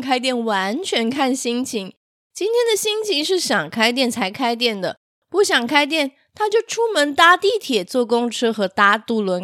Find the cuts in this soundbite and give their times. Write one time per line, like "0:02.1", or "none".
none